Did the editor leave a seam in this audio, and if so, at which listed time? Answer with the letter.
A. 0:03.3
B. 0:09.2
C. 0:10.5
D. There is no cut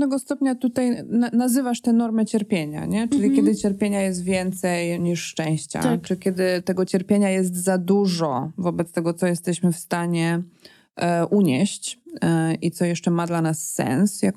D